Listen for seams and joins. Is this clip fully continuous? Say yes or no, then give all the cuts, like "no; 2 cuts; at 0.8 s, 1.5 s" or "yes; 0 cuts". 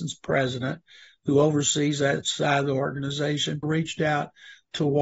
no; 1 cut; at 3.6 s